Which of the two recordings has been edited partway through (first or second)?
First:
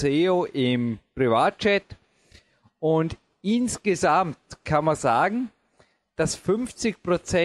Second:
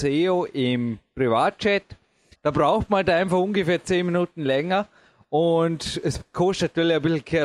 second